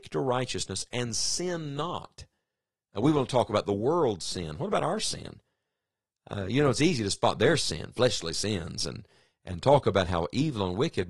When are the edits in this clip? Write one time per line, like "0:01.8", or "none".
none